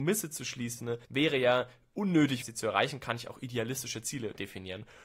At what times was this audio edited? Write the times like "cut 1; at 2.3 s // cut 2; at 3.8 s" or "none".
cut 1; at 1.0 s // cut 2; at 2.4 s